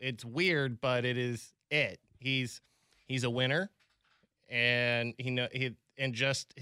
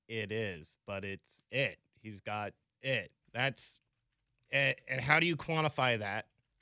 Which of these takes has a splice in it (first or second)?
second